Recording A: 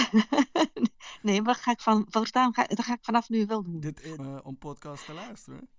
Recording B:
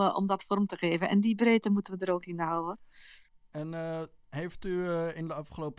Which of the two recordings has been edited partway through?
A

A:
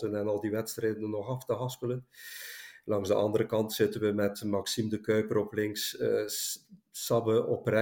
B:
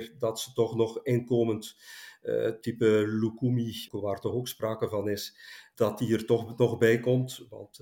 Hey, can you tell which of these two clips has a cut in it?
B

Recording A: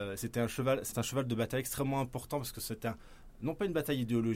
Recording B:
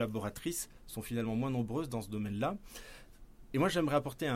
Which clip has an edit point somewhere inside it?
A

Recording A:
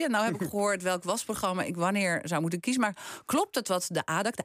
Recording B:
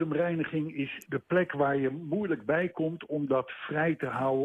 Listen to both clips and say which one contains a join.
B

